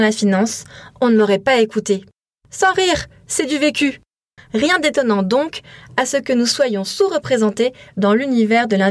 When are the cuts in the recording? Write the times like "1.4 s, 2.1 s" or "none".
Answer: 4.4 s